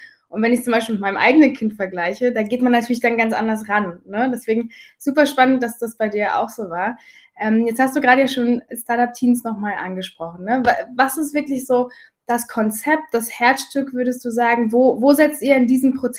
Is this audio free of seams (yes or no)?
yes